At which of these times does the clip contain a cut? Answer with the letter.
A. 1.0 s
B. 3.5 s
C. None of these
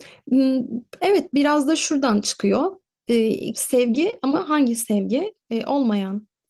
B